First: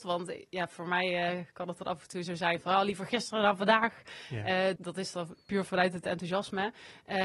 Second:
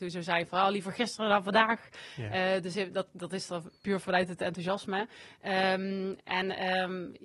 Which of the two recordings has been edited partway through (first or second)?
first